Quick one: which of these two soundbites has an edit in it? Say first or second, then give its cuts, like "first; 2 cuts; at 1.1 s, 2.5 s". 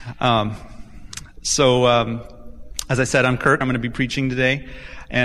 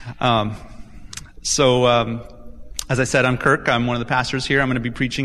first; 1 cut; at 3.6 s